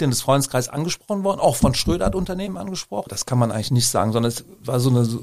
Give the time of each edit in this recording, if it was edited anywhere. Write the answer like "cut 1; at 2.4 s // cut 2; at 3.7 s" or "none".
cut 1; at 3.1 s